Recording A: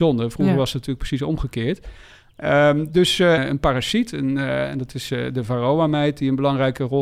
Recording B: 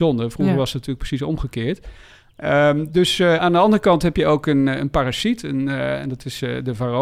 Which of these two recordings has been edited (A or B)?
A